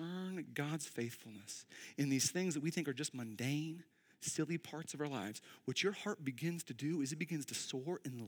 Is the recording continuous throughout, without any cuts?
yes; 0 cuts

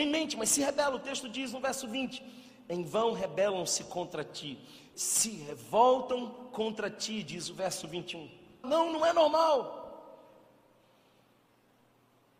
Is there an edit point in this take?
yes; 2 cuts; at 4.9 s, 8.6 s

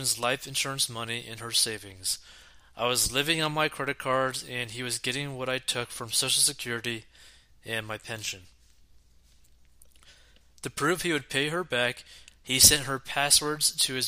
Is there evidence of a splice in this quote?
no; 0 cuts

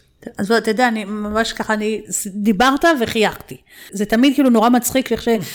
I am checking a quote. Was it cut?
yes; 1 cut; at 3.9 s

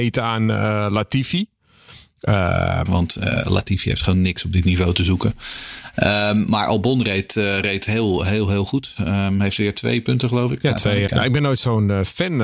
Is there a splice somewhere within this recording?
yes; 2 cuts; at 2.9 s, 11.1 s

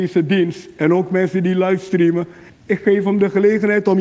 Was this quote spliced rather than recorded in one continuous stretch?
yes; 1 cut; at 2.5 s

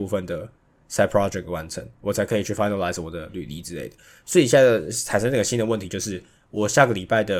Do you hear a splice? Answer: no; 0 cuts

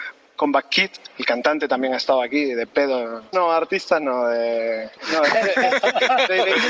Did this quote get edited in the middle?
yes; 2 cuts; at 3.3 s, 5.0 s

